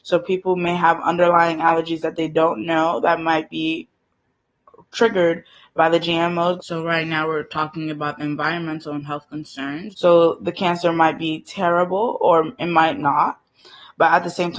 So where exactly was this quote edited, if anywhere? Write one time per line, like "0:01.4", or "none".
0:06.6
0:09.9